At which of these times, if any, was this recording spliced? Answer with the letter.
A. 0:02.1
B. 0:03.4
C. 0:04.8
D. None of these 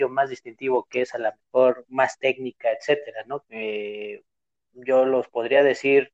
B